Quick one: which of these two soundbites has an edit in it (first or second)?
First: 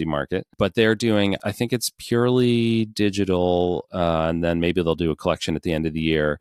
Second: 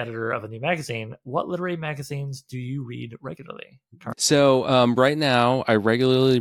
second